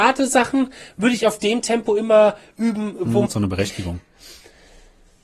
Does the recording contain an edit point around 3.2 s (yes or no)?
yes